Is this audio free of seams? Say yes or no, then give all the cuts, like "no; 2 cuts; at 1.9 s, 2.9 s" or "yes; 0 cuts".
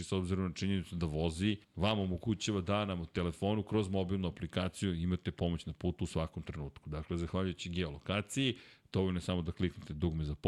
no; 1 cut; at 1.6 s